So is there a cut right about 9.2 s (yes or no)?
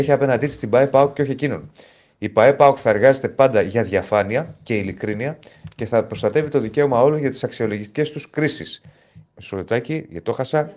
yes